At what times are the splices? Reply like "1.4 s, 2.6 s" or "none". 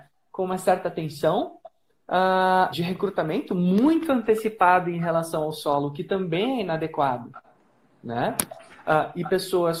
2.7 s